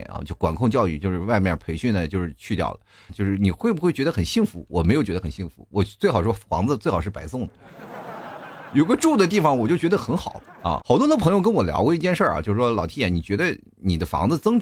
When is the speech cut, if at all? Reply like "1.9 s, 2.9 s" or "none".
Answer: 3.1 s, 10.8 s